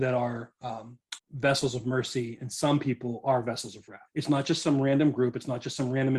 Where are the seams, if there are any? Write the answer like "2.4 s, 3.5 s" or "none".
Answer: 1.2 s, 4.1 s